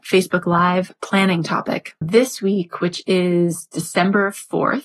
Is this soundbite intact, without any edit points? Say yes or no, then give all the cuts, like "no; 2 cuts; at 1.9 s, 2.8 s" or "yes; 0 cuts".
no; 1 cut; at 2.0 s